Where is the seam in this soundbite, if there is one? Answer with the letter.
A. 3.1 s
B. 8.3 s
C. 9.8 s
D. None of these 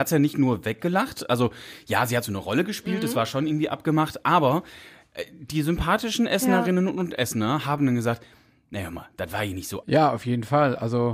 C